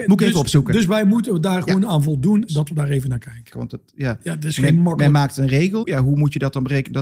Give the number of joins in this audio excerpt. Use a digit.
3